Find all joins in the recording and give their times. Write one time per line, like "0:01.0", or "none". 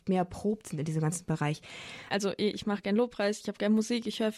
0:02.1